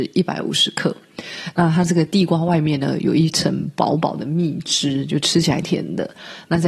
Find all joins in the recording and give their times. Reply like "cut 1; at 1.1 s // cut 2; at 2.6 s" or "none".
cut 1; at 5.6 s